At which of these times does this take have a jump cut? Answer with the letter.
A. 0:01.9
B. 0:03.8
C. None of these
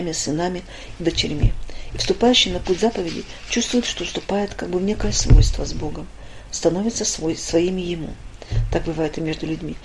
C